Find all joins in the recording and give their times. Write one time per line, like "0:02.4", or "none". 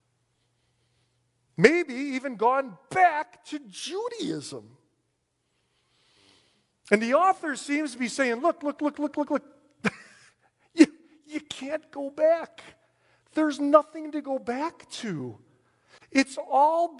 0:08.9